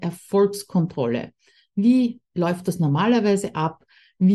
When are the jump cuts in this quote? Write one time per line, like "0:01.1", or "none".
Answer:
none